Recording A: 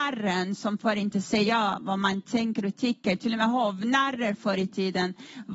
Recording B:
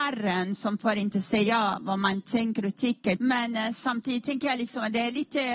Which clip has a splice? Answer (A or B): B